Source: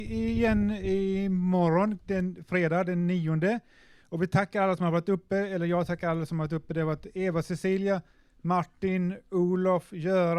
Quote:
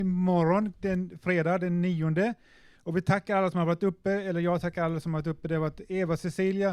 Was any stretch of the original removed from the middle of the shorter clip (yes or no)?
no